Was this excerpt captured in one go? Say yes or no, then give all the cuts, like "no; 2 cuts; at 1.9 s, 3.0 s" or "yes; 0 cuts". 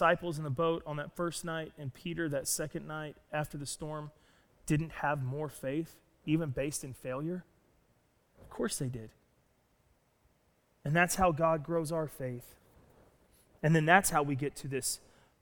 yes; 0 cuts